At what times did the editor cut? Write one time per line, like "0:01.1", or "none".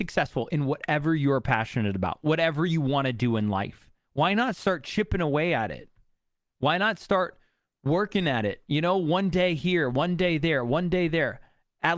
0:04.0